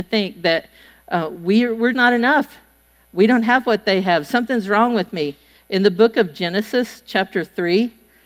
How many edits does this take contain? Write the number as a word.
two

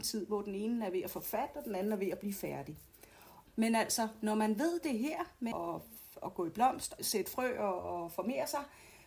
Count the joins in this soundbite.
three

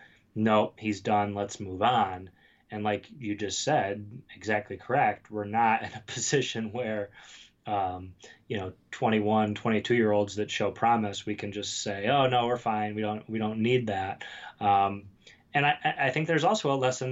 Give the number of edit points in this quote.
zero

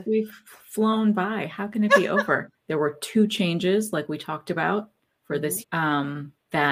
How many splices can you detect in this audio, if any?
two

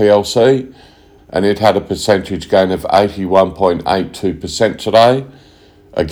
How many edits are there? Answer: one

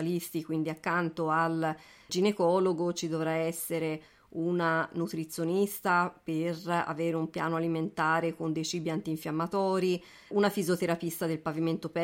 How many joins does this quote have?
two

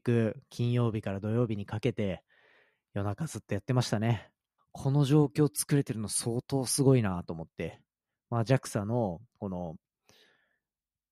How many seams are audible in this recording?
one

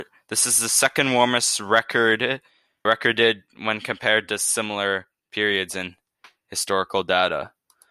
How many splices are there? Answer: one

